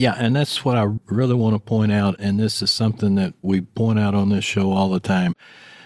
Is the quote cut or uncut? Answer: uncut